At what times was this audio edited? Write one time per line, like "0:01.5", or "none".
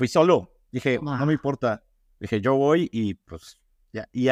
none